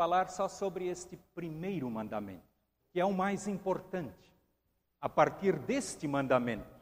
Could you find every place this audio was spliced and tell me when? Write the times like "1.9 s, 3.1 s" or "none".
2.8 s